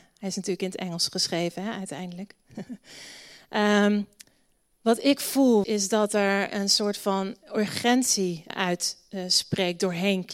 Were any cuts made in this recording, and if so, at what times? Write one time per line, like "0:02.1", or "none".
0:05.6
0:08.5